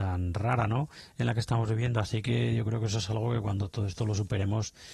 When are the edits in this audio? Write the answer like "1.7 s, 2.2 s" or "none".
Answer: none